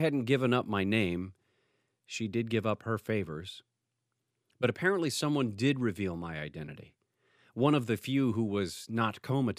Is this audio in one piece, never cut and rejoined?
yes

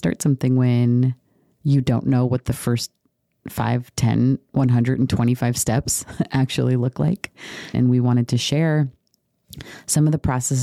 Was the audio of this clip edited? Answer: yes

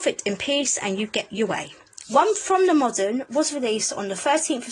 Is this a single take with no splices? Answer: no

